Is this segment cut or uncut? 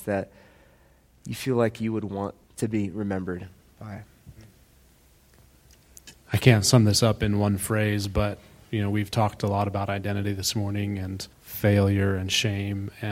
cut